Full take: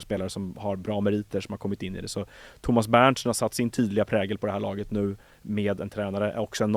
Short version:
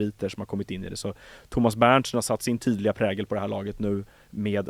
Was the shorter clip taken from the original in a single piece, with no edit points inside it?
yes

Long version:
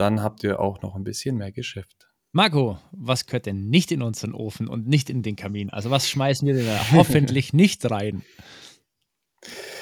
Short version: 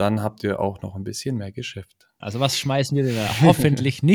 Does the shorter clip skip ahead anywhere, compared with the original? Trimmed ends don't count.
yes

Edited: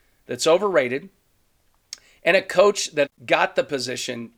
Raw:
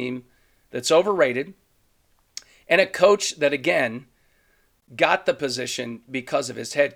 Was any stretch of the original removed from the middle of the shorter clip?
yes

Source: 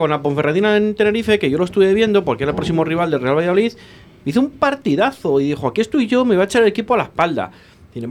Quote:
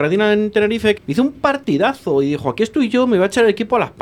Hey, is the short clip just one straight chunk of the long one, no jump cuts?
no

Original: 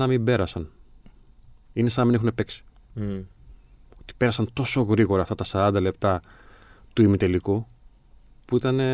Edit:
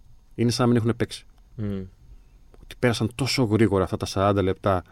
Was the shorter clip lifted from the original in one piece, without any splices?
yes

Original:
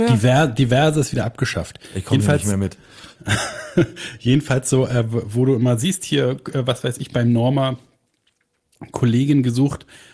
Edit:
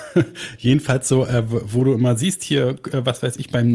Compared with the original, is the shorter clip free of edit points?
yes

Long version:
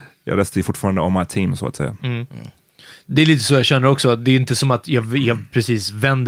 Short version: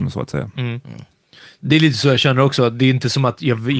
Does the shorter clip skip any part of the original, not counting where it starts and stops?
no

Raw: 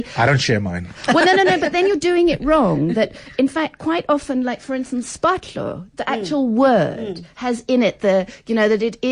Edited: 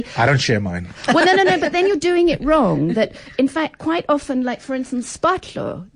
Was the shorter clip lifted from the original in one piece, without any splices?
yes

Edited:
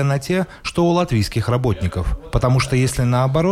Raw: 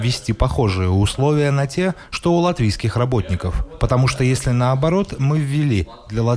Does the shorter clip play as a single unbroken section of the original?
yes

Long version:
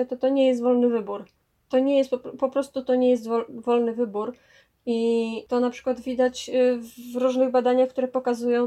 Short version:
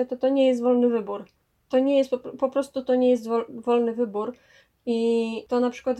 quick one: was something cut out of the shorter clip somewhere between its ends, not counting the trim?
no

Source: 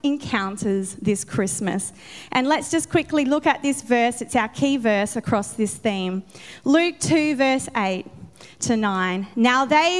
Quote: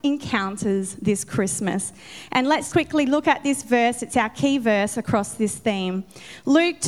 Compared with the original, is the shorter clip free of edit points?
no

